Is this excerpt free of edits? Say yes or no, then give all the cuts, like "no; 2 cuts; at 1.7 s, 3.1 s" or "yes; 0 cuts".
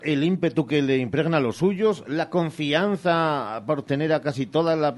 yes; 0 cuts